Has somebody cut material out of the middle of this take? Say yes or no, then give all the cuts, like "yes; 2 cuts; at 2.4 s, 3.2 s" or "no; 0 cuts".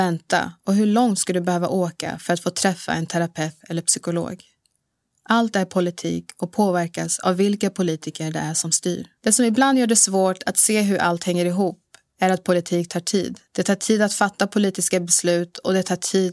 yes; 2 cuts; at 9.2 s, 13.4 s